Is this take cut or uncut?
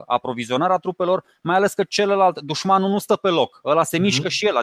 uncut